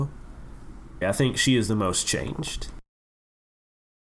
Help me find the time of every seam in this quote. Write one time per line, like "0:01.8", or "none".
0:01.0